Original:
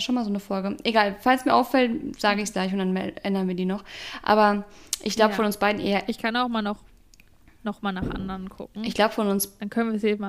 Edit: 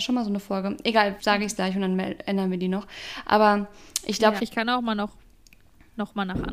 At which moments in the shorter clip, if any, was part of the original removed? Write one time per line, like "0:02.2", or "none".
0:01.2
0:04.4